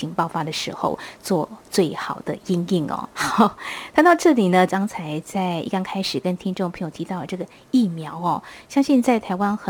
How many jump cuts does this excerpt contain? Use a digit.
2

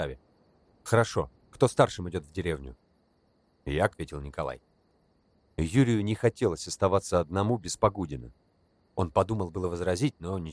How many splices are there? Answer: 1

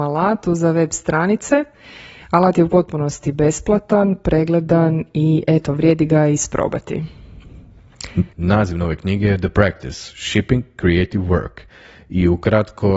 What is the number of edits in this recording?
1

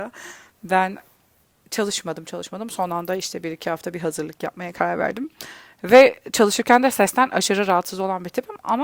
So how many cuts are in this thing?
1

